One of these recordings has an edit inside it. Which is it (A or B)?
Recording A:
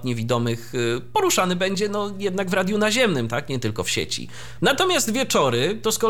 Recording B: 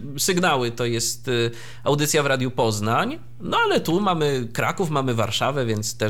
A